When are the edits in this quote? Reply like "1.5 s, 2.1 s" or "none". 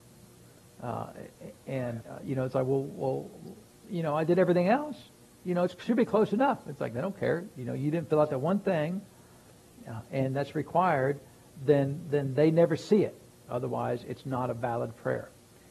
2.0 s, 13.4 s